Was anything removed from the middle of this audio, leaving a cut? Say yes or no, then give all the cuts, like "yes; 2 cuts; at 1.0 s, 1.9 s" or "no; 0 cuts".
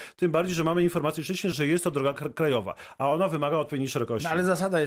yes; 1 cut; at 1.5 s